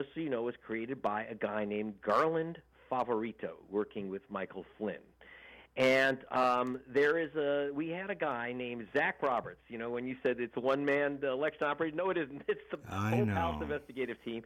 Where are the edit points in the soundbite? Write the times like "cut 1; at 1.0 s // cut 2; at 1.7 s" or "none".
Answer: none